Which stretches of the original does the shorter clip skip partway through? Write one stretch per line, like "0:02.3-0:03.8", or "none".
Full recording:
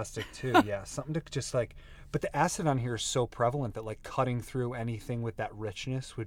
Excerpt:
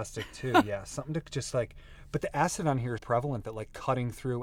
0:03.0-0:03.3